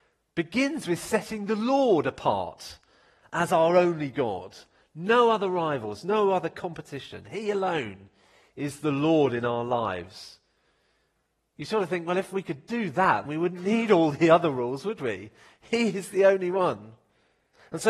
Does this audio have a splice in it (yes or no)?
yes